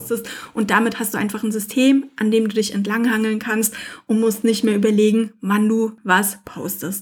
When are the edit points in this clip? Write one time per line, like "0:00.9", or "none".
none